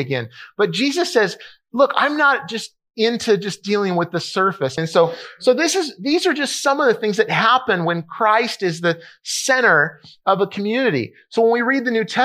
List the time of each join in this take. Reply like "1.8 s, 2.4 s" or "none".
4.8 s